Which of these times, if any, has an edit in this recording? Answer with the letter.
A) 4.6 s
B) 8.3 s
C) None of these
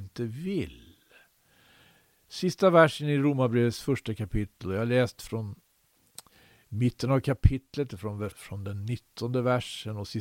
B